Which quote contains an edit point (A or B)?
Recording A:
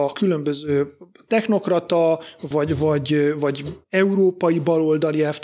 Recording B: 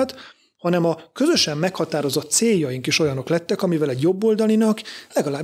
A